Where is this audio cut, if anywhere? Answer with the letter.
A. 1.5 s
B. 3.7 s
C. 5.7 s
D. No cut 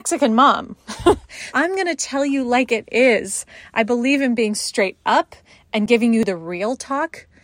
A